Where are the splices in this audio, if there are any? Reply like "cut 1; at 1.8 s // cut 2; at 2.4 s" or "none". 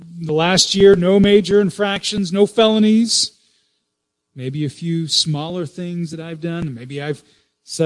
none